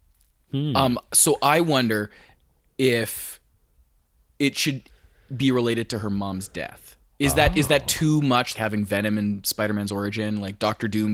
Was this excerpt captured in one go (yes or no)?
no